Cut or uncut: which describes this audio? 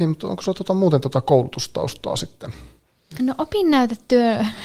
cut